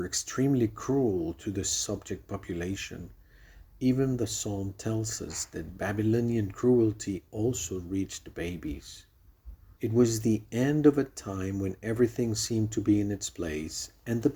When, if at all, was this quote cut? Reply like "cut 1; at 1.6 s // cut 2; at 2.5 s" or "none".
cut 1; at 3.6 s // cut 2; at 9.8 s